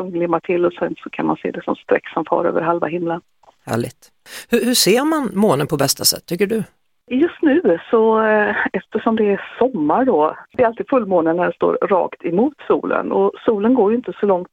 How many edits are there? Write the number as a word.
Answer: zero